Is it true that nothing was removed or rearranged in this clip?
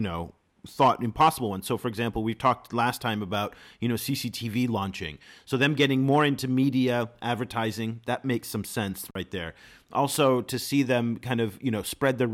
yes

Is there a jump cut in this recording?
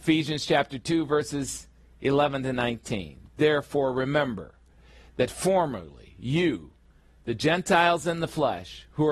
no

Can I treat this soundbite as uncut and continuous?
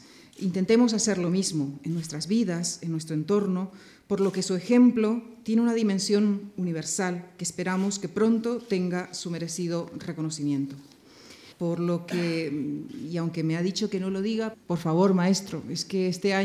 no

